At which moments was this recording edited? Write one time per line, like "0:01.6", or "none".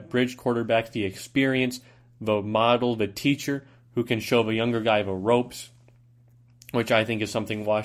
none